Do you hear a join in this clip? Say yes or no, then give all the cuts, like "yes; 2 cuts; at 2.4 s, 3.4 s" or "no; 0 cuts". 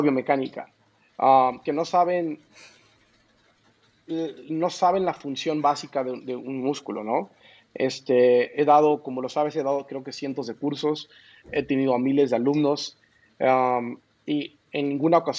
no; 0 cuts